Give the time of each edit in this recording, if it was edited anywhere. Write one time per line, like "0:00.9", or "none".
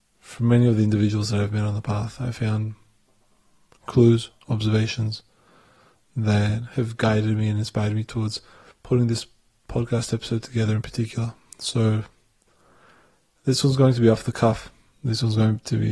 none